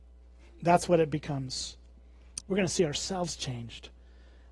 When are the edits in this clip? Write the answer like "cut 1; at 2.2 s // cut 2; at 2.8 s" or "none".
cut 1; at 2.4 s